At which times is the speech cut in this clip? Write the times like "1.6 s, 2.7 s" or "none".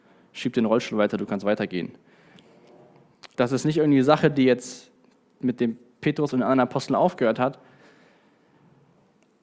3.3 s